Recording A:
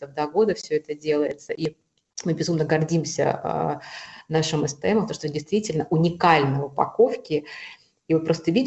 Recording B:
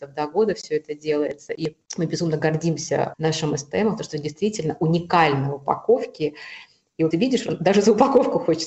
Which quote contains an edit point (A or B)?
B